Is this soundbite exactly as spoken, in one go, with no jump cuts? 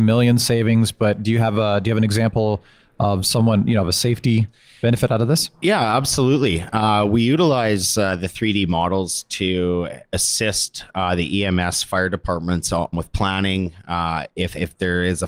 no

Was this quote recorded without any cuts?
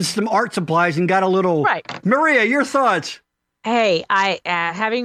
no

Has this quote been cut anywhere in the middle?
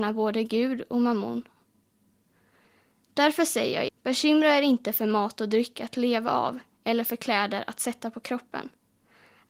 yes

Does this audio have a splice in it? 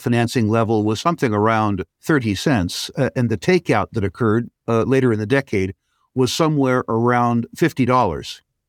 yes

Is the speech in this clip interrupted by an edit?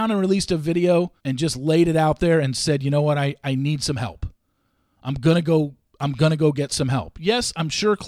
yes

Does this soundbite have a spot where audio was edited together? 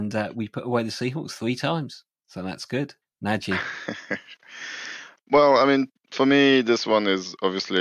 yes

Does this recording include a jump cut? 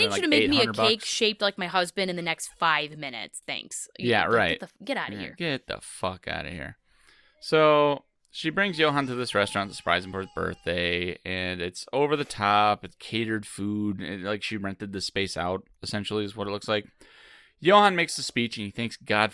no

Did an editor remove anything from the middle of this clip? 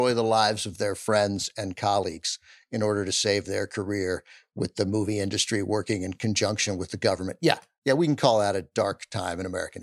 no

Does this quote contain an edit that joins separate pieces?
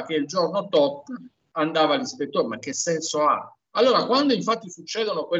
no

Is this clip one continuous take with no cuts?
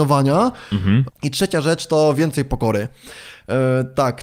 no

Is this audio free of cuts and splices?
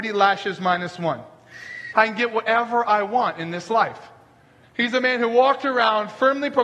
no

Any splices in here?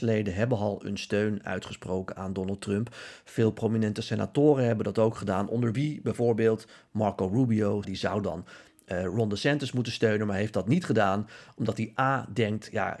yes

